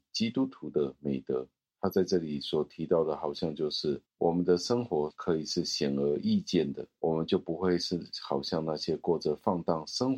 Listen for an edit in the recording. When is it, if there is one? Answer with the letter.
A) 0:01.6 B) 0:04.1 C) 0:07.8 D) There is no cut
B